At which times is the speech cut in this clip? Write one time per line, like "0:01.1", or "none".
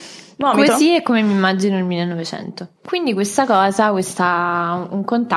0:02.7